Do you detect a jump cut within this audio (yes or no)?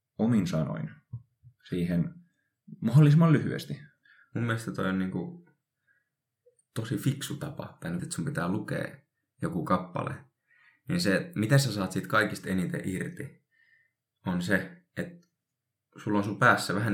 yes